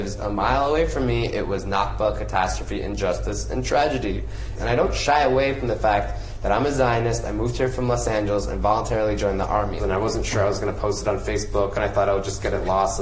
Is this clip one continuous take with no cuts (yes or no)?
no